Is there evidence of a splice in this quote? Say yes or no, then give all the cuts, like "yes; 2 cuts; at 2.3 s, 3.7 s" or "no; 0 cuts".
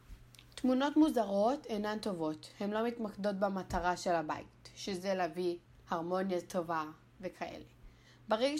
no; 0 cuts